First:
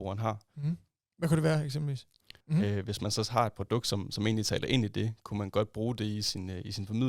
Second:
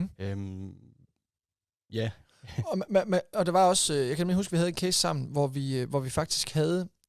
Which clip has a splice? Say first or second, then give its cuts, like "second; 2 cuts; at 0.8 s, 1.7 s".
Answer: first; 1 cut; at 2.4 s